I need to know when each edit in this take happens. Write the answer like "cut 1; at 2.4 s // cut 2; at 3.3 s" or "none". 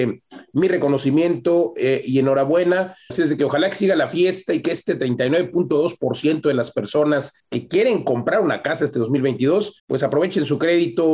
cut 1; at 3.1 s // cut 2; at 7.4 s // cut 3; at 9.8 s